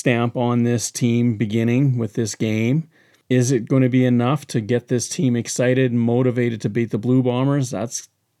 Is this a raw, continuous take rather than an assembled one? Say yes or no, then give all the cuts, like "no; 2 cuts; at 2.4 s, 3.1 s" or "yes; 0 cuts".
yes; 0 cuts